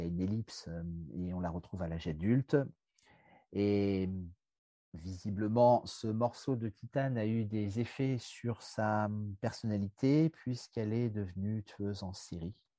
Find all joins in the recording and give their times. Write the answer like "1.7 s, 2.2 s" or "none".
none